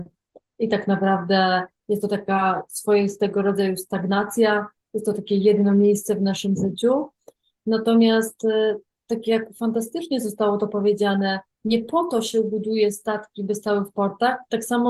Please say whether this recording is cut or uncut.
uncut